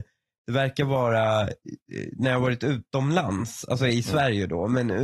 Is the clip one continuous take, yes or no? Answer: yes